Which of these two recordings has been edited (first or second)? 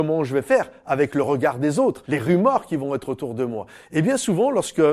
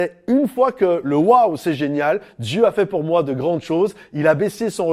first